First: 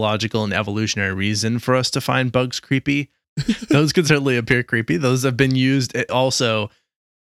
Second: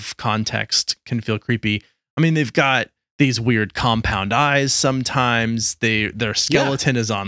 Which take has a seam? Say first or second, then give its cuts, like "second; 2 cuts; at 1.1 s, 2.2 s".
first; 2 cuts; at 3.2 s, 6.1 s